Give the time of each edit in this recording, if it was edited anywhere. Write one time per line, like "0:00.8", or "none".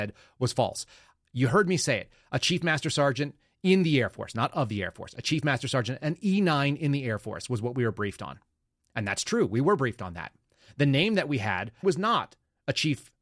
0:11.8